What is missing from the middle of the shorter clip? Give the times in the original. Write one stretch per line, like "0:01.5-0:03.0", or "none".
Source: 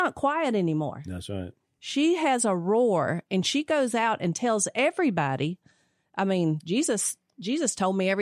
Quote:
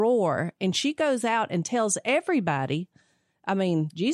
none